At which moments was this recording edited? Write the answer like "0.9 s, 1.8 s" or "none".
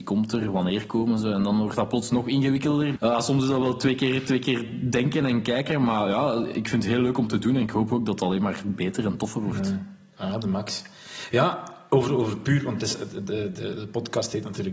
3.0 s